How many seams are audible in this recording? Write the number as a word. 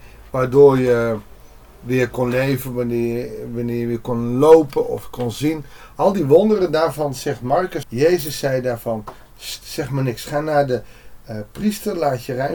one